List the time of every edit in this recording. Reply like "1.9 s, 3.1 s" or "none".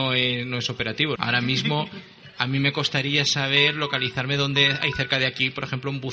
1.2 s